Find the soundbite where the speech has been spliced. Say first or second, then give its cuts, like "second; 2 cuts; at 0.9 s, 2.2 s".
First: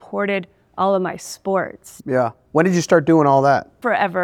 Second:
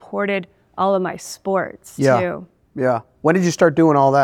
first; 1 cut; at 2.0 s